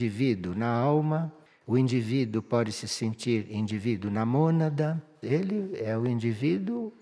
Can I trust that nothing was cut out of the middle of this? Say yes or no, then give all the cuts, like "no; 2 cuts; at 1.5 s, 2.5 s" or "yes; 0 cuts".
no; 1 cut; at 5.2 s